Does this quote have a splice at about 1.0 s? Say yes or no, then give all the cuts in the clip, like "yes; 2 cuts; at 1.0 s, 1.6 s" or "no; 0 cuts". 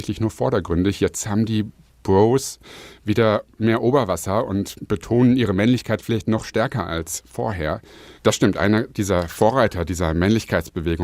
no; 1 cut; at 8.2 s